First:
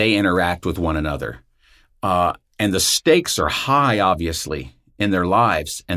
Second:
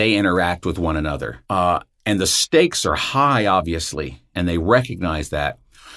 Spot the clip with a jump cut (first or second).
second